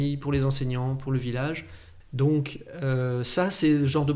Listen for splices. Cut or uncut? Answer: cut